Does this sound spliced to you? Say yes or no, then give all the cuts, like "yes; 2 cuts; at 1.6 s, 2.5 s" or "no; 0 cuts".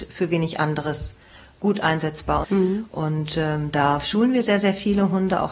yes; 1 cut; at 2.4 s